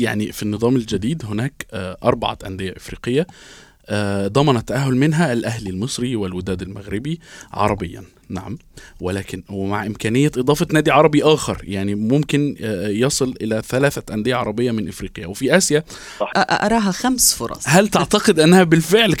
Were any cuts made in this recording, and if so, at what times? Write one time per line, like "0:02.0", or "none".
0:16.3